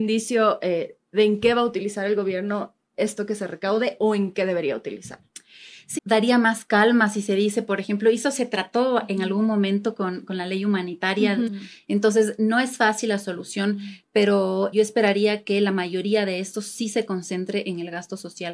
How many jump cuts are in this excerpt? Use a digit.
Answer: 3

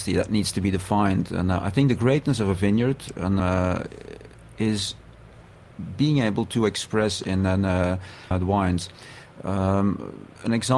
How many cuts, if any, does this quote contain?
2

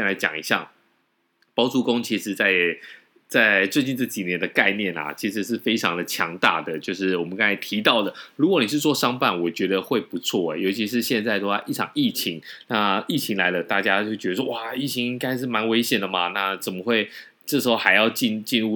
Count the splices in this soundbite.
0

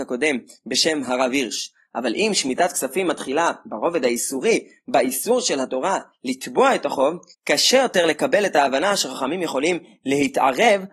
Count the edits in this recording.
1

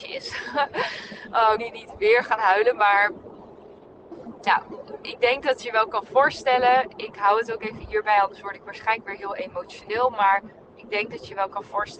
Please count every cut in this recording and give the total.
2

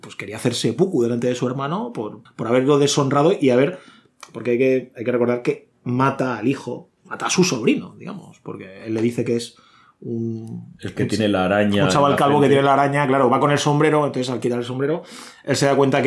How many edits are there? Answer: 1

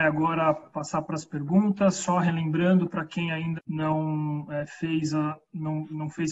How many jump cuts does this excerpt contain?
1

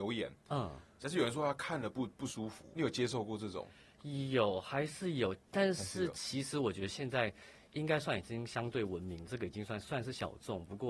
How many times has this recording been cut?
1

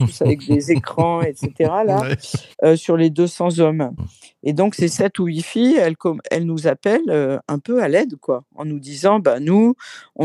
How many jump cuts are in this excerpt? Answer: 1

